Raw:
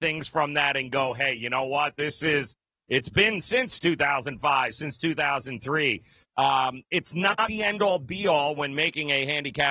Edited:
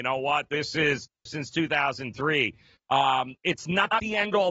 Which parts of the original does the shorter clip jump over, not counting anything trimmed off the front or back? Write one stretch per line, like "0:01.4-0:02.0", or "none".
0:02.7-0:04.7

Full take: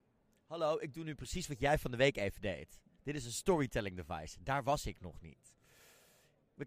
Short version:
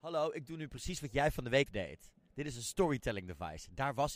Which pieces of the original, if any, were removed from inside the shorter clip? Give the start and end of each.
0:02.1-0:02.4

